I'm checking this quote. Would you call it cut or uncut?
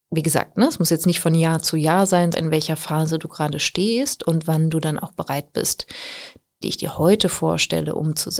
cut